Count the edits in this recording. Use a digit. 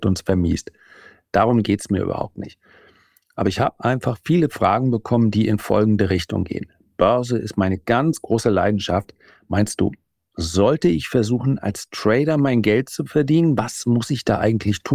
0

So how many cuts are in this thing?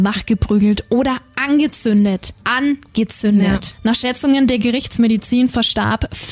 2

